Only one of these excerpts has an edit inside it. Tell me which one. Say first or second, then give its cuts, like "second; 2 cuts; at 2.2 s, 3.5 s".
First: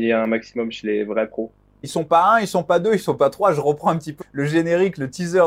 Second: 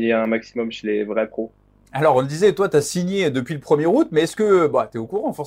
first; 2 cuts; at 1.8 s, 4.2 s